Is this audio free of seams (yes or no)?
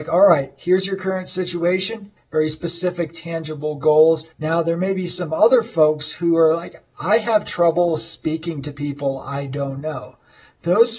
no